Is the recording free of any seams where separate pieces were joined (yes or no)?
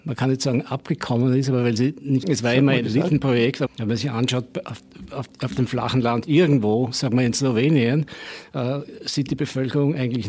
no